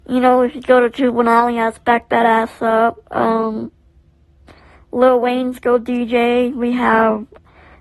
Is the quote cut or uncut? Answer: uncut